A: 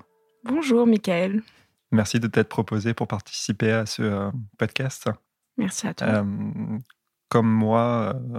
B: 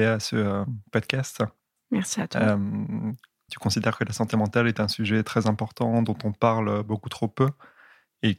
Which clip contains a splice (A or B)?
B